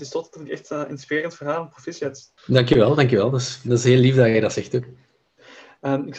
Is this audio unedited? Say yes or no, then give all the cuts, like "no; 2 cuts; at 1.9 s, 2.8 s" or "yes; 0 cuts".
no; 1 cut; at 2.4 s